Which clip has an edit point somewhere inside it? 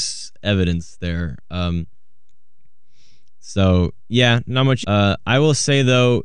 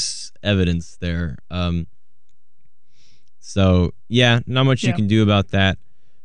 first; 1 cut; at 4.8 s

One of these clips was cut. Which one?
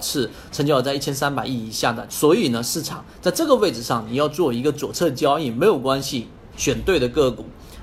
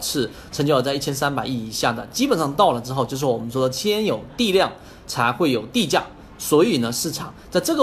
first; 2 cuts; at 2.1 s, 6.5 s

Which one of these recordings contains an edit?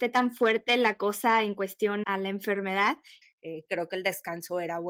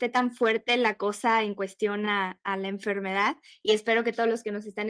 first; 2 cuts; at 2.0 s, 3.2 s

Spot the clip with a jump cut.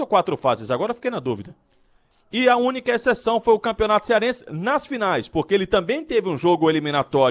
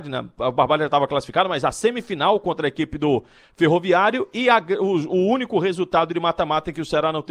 first; 1 cut; at 2.1 s

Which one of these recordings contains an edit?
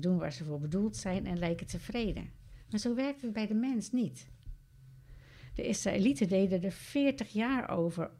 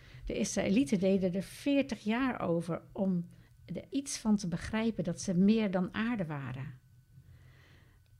second; 1 cut; at 3.9 s

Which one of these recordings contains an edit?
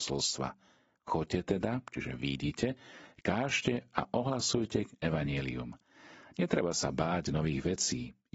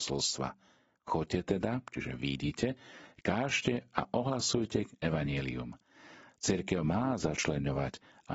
second; 1 cut; at 6.3 s

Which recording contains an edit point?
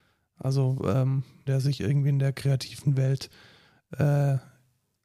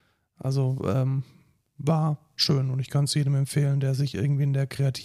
first; 1 cut; at 1.5 s

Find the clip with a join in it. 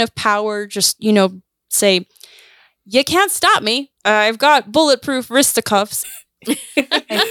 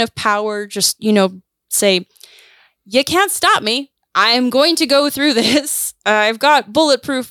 first; 2 cuts; at 4.0 s, 6.0 s

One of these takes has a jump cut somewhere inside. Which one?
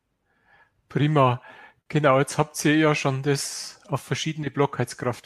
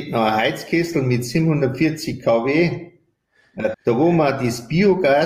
second; 1 cut; at 3.7 s

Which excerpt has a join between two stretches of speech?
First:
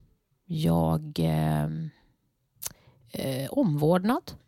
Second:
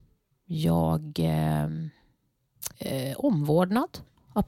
second; 1 cut; at 2.7 s

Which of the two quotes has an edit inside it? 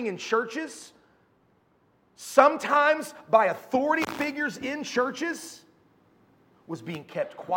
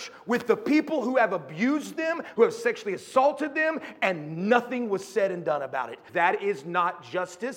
second; 2 cuts; at 2.3 s, 6.1 s

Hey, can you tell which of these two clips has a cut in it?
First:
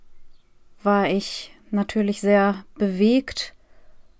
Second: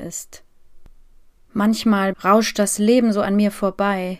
second; 1 cut; at 2.1 s

